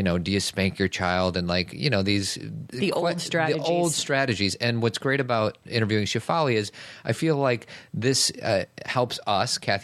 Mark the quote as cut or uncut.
uncut